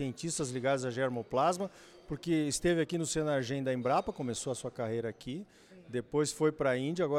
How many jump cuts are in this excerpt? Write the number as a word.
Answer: zero